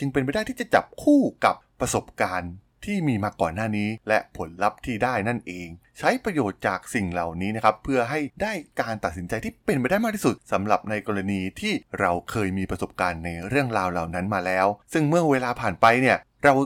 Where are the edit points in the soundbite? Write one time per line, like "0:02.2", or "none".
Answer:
none